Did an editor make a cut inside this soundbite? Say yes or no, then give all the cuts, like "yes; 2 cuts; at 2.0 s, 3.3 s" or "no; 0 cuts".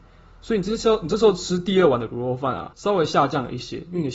yes; 1 cut; at 2.7 s